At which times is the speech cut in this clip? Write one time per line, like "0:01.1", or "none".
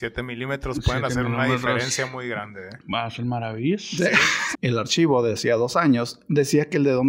0:04.5